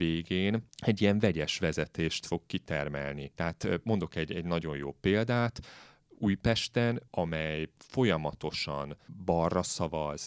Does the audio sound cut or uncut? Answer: uncut